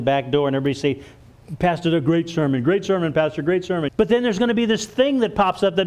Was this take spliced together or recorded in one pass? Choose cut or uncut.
cut